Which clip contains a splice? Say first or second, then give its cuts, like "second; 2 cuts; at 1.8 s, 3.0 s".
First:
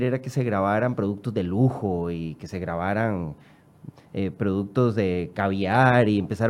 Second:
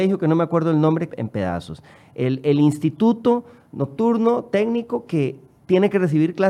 second; 1 cut; at 1.1 s